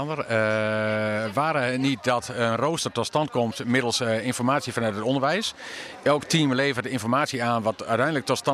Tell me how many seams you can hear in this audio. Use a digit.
0